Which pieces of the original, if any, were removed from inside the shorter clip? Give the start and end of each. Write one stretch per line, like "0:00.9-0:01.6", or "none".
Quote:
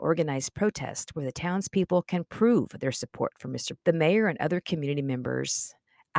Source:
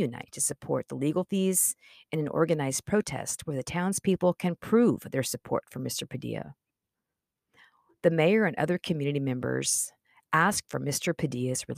0:06.1-0:07.9